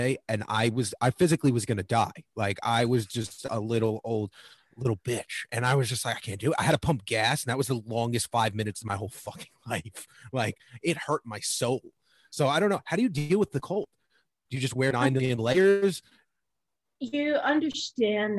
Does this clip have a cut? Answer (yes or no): no